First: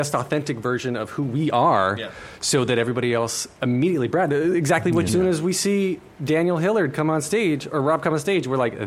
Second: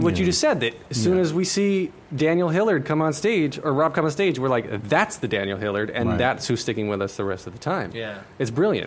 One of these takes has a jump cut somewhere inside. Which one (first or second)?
first